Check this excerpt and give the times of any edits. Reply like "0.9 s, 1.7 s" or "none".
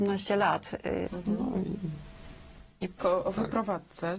1.1 s, 3.0 s